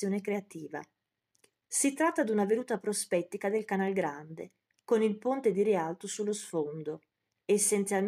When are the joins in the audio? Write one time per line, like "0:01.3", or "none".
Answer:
0:01.6